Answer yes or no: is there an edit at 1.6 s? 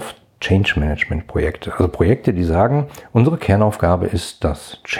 no